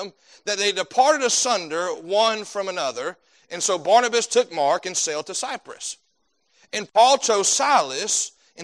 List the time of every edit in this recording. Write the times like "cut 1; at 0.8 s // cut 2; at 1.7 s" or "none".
none